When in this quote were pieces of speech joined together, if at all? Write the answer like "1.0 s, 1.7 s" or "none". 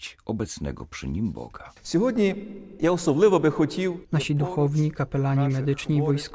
4.0 s